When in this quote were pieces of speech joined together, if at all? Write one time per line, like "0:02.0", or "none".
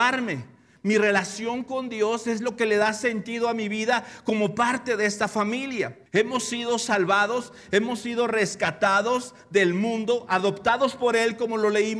0:06.1